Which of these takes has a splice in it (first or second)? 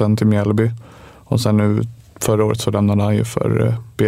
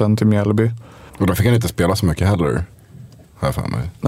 second